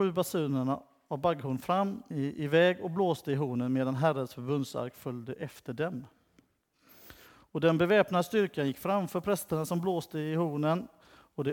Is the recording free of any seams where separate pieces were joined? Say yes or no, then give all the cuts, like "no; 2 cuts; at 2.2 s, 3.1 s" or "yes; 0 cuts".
no; 1 cut; at 2.1 s